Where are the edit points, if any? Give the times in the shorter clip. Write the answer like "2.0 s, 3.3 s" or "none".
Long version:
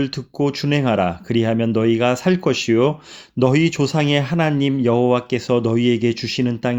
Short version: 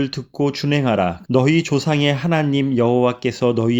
1.2 s